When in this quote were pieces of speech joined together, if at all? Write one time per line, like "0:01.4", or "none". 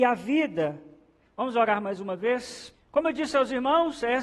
0:01.2
0:02.7